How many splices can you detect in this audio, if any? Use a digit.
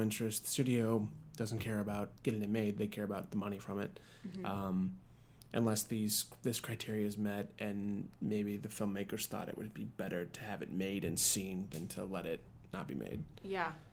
0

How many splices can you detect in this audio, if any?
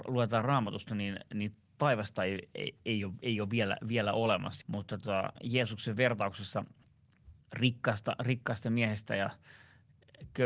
2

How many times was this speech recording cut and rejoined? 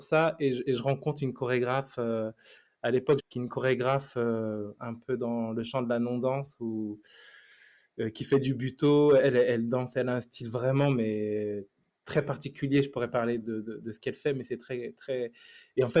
2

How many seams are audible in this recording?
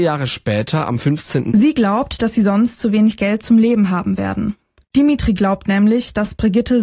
2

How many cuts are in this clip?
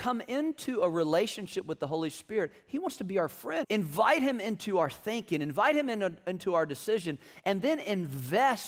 1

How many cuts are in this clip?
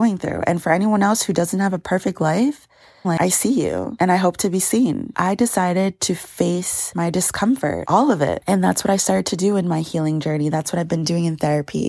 1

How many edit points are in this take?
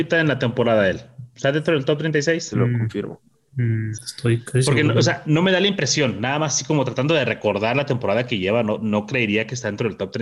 2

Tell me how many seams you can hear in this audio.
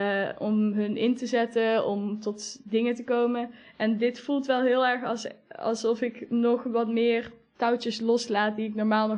0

